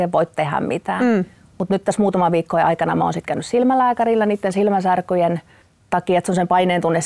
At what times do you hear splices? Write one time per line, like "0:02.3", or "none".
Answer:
none